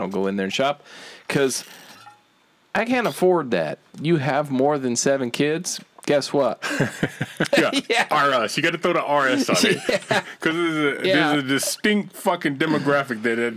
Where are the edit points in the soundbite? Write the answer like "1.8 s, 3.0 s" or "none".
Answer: 3.9 s, 7.5 s